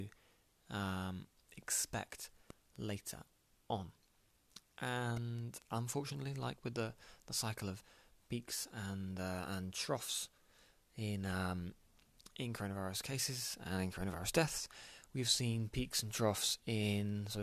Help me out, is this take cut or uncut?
uncut